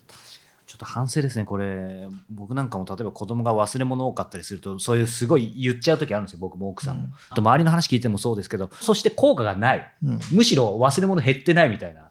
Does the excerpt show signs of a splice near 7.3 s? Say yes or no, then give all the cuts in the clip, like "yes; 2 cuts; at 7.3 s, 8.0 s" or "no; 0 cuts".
yes; 2 cuts; at 7.3 s, 8.8 s